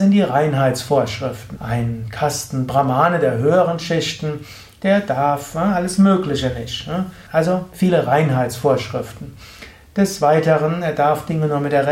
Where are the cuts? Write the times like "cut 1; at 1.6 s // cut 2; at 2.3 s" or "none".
cut 1; at 1.6 s // cut 2; at 7.3 s